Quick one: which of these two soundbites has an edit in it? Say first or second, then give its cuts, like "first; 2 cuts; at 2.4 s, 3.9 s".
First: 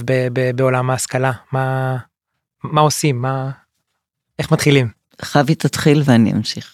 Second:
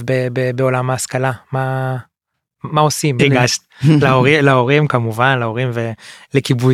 second; 1 cut; at 3.2 s